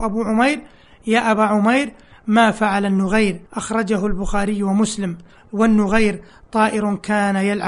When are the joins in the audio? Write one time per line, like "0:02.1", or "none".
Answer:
0:03.5